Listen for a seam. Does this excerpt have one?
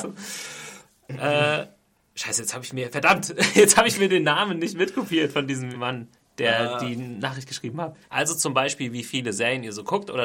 yes; 2 cuts; at 5.7 s, 8.0 s

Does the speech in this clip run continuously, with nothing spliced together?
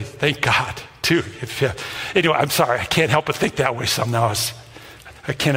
yes; 0 cuts

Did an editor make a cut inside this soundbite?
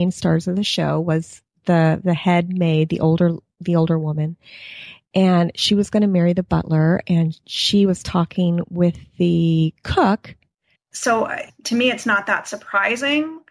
yes; 1 cut; at 10.7 s

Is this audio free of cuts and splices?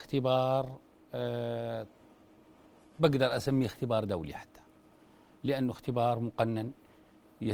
yes; 0 cuts

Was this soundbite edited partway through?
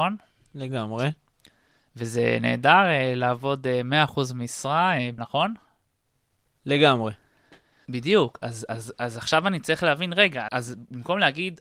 yes; 3 cuts; at 5.2 s, 7.9 s, 10.5 s

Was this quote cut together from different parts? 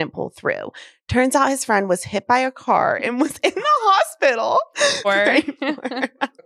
yes; 1 cut; at 5.0 s

